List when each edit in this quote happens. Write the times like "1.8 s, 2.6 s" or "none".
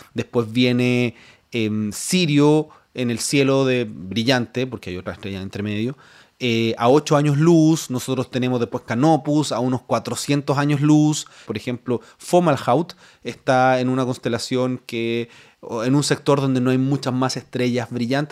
11.5 s